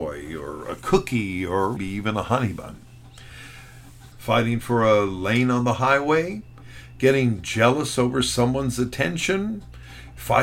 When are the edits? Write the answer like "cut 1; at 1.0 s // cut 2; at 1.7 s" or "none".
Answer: cut 1; at 1.8 s // cut 2; at 4.1 s